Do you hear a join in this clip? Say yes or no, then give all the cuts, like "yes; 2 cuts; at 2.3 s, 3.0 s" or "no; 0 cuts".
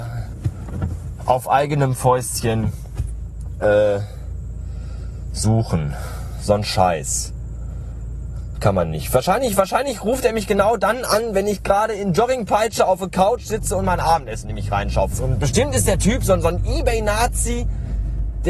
yes; 2 cuts; at 8.6 s, 15.1 s